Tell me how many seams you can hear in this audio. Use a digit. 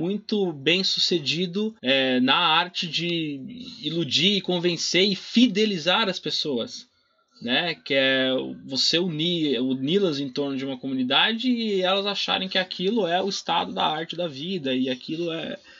1